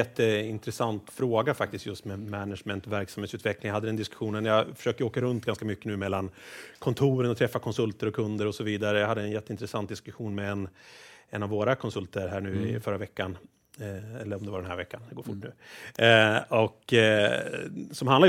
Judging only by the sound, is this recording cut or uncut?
uncut